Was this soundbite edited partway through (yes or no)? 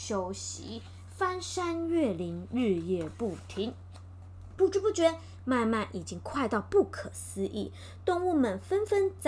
no